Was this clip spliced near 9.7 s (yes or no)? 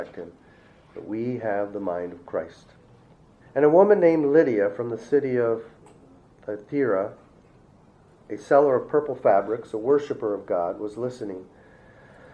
no